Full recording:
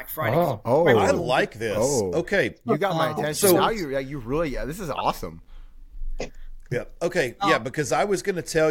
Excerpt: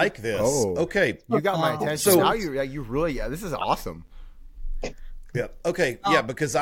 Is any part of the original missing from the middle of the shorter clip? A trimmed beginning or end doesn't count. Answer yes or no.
no